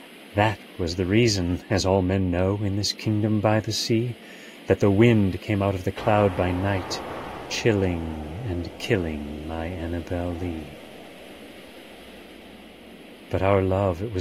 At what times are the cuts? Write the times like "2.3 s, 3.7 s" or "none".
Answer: none

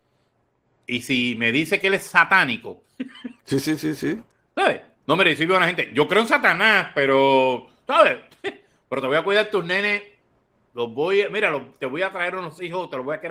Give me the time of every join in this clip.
none

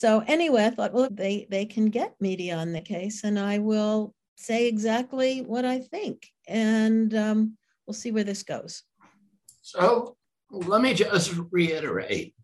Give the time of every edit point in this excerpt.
1.1 s

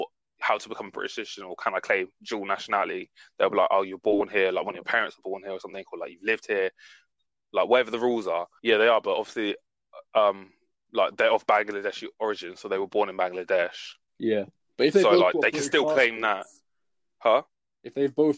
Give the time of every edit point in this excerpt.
8.6 s

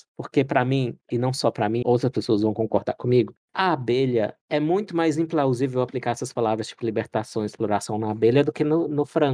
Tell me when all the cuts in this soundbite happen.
1.8 s

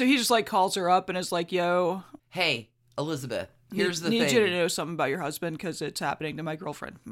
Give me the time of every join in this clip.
2.2 s

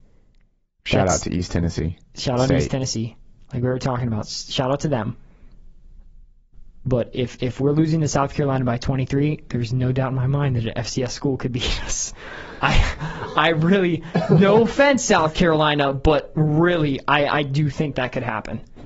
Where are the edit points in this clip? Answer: 17.9 s

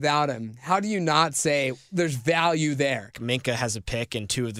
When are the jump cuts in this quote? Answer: 3.1 s

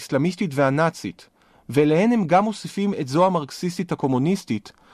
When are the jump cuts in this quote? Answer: none

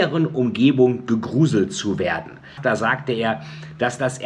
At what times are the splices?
2.6 s

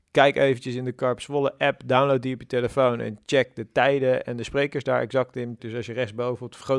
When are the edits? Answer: 5.6 s

